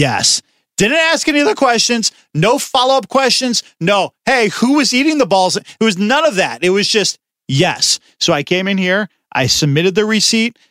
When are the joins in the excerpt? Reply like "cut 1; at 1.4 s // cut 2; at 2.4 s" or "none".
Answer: none